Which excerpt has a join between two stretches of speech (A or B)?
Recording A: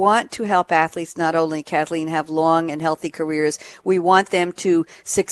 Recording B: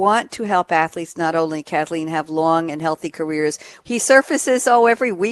B